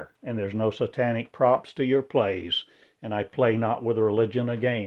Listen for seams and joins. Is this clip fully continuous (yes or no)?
yes